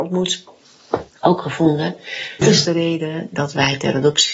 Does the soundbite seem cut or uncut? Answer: cut